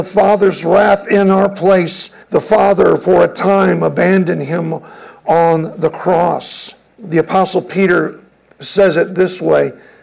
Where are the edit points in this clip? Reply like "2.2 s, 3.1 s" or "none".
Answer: 2.2 s, 6.9 s